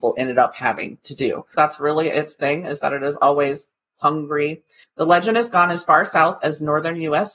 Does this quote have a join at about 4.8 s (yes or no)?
yes